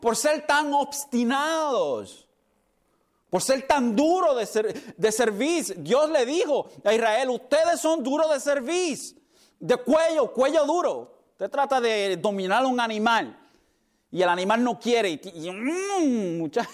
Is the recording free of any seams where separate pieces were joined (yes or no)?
yes